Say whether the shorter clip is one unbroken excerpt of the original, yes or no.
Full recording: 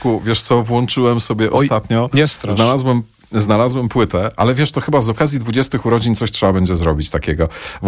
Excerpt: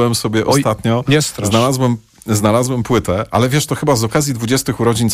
yes